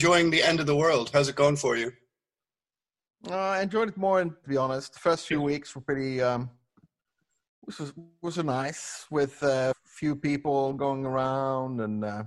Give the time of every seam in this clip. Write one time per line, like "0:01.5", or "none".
0:04.4
0:09.7